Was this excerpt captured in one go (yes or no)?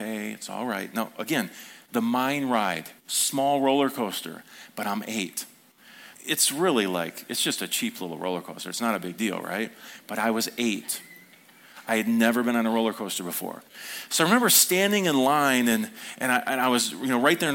no